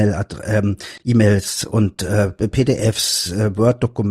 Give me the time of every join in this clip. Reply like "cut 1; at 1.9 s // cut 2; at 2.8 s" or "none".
none

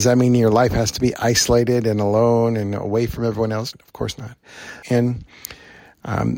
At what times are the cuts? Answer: cut 1; at 3.7 s // cut 2; at 4.8 s

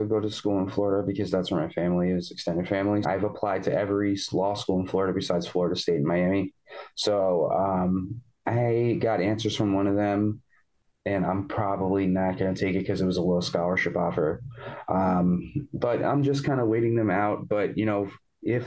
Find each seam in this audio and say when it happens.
cut 1; at 3.0 s

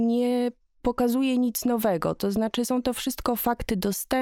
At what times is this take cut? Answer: none

